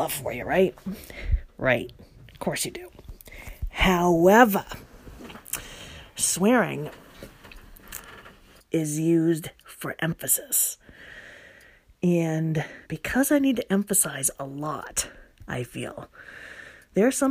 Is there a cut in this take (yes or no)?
yes